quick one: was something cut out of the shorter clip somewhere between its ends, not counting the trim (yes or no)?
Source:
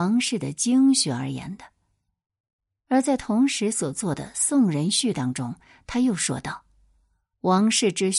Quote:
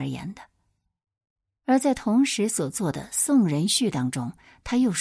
no